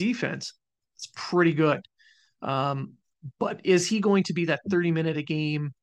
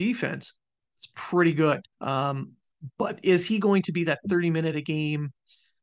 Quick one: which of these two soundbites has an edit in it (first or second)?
second